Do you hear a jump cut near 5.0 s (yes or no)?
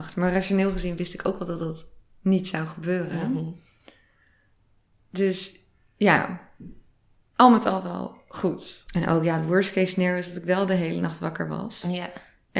no